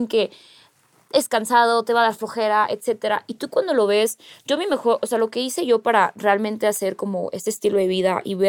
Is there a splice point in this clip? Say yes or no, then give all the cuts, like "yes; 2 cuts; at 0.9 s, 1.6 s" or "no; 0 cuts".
no; 0 cuts